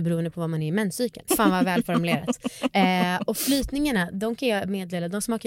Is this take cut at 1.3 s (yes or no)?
yes